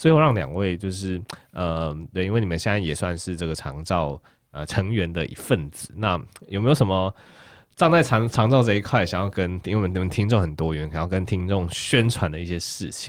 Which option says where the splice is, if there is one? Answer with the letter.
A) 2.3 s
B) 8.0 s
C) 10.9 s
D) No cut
D